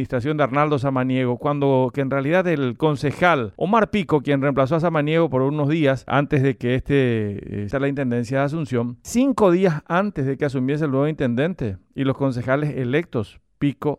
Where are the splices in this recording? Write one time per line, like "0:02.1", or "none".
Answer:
0:06.1
0:07.7